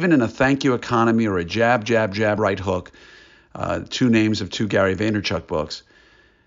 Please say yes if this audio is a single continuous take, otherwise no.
yes